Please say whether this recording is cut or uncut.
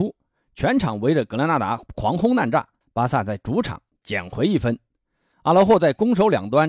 cut